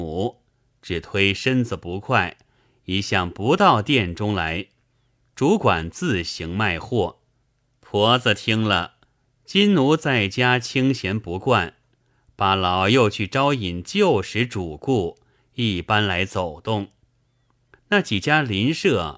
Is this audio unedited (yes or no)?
no